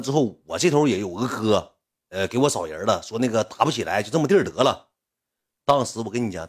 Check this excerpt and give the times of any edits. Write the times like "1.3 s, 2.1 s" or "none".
none